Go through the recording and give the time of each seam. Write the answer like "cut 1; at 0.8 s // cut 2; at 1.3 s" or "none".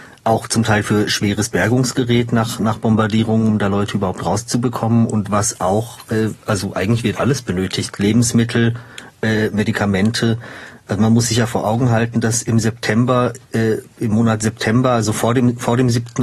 none